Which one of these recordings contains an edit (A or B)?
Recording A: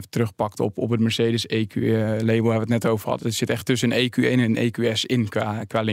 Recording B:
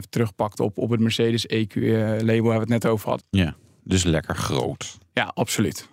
B